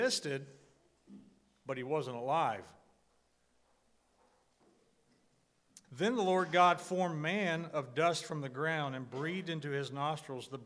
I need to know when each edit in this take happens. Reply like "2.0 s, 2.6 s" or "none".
5.8 s